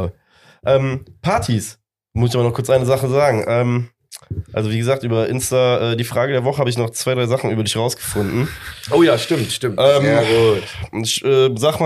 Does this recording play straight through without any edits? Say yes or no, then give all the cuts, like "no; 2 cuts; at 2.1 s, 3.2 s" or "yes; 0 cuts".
yes; 0 cuts